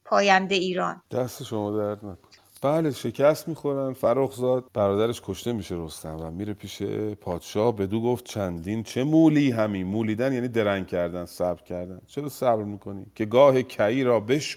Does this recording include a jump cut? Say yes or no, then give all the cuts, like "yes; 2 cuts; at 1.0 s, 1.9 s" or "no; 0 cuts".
yes; 2 cuts; at 1.1 s, 4.7 s